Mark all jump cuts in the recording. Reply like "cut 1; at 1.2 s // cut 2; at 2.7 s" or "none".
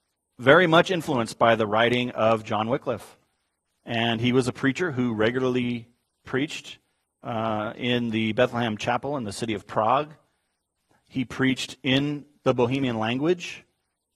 none